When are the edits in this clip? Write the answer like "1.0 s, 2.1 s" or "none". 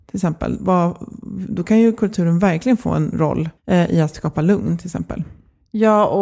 3.6 s